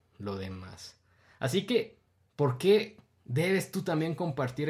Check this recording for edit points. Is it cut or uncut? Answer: uncut